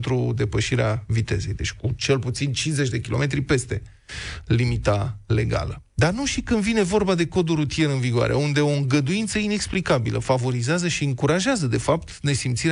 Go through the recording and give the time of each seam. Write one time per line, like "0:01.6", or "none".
0:06.0